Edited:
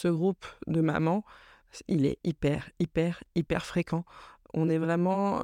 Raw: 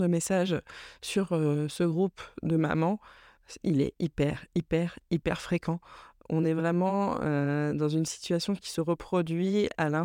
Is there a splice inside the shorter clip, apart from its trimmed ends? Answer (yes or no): no